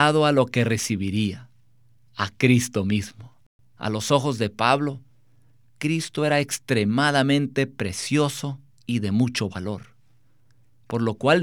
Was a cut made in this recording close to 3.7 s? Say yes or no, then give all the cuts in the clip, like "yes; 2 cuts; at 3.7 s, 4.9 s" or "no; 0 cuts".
yes; 1 cut; at 3.7 s